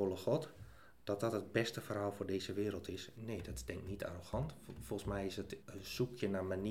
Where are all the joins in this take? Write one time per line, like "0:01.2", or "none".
0:03.1